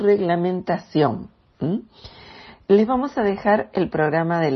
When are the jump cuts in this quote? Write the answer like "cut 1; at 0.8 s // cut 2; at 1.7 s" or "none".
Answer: none